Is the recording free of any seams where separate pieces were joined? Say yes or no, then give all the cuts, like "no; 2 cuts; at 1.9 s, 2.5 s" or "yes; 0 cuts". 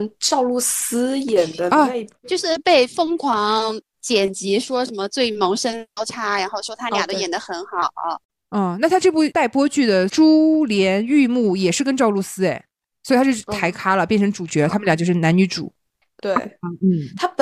no; 1 cut; at 16.2 s